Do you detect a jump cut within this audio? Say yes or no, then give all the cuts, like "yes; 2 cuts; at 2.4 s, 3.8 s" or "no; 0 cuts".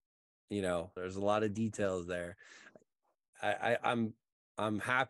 yes; 1 cut; at 1.0 s